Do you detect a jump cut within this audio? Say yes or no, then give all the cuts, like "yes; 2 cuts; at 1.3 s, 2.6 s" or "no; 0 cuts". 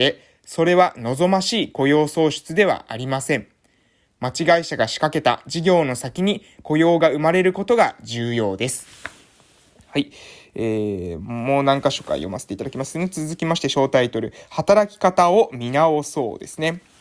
no; 0 cuts